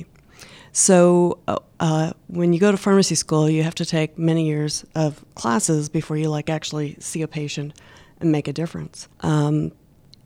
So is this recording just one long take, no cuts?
no; 1 cut; at 9.1 s

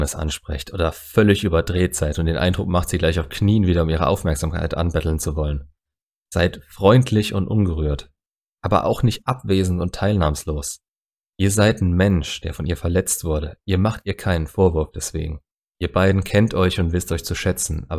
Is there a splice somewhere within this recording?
no; 0 cuts

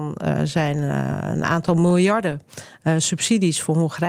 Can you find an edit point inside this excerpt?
no; 0 cuts

